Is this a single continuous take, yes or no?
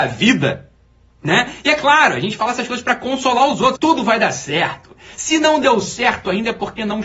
no